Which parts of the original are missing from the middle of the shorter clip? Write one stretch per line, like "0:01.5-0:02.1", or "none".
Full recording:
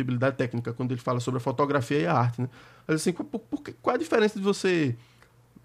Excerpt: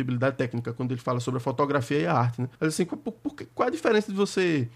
0:02.6-0:02.8